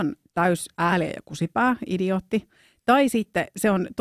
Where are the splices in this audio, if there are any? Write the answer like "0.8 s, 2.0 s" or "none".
none